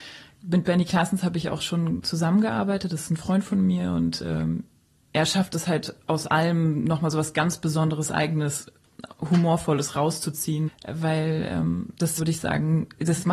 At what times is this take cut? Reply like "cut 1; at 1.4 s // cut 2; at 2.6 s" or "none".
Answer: cut 1; at 10.7 s // cut 2; at 12.2 s

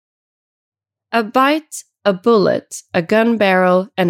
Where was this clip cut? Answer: none

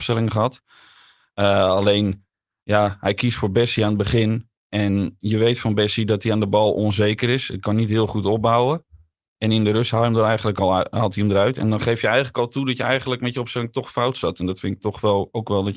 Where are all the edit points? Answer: none

